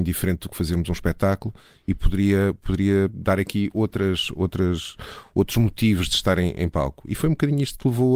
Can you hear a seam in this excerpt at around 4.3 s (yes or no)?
yes